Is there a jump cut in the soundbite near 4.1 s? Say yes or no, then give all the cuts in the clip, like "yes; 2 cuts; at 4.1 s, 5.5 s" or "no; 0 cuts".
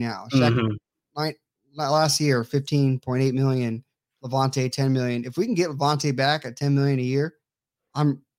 no; 0 cuts